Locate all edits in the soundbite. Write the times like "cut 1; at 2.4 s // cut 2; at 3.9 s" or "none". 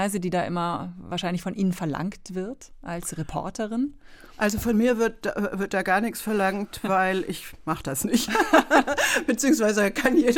none